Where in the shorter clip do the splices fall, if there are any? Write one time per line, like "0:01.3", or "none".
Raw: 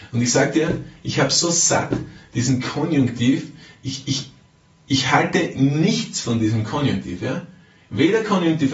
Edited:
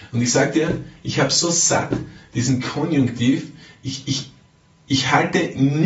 none